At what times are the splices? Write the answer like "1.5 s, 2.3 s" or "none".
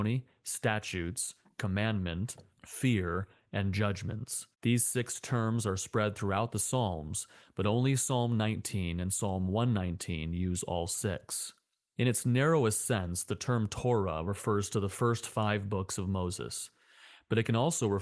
4.5 s